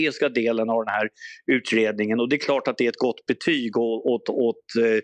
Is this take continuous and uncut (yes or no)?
yes